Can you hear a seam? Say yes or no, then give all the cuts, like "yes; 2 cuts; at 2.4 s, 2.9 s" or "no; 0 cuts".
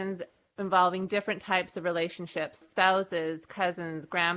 yes; 1 cut; at 2.6 s